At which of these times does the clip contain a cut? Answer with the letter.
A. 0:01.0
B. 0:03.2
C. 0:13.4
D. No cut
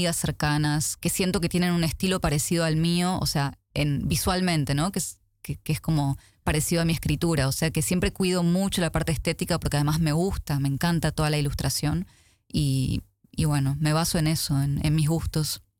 A